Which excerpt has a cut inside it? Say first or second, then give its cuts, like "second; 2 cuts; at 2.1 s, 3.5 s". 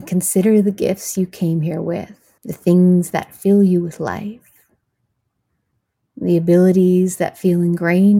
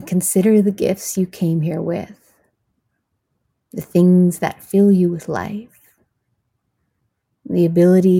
first; 1 cut; at 2.4 s